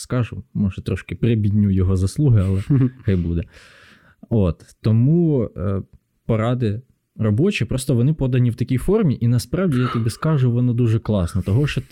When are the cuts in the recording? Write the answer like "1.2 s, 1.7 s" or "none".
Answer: none